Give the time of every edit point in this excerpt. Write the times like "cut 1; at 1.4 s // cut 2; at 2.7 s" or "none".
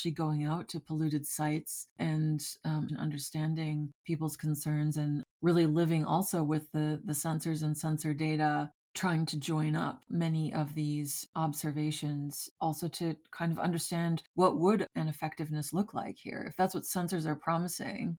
cut 1; at 2.9 s